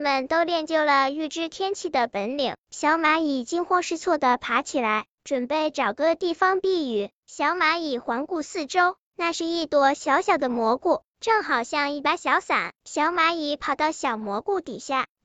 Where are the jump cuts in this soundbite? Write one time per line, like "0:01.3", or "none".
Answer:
0:09.1
0:12.8